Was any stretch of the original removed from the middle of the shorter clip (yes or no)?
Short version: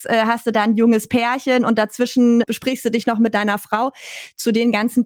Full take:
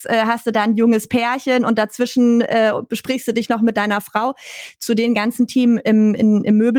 yes